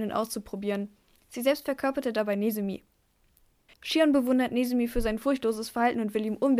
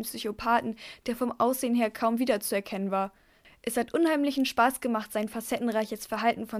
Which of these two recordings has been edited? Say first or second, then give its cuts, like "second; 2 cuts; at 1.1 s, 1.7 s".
first; 1 cut; at 3.7 s